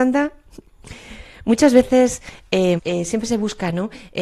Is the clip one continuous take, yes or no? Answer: no